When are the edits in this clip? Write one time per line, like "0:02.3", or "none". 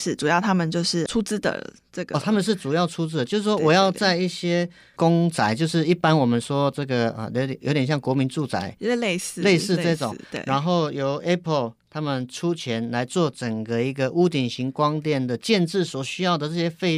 none